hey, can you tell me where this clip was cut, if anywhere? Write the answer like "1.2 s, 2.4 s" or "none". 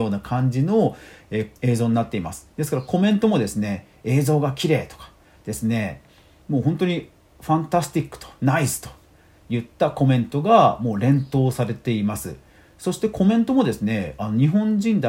1.5 s